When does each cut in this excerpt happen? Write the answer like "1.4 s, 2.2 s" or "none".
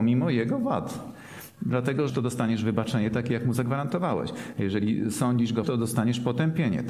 2.1 s, 5.6 s